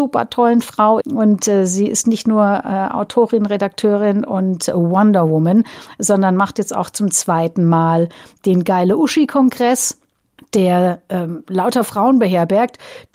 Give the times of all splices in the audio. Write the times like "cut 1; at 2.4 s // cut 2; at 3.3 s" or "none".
cut 1; at 1.0 s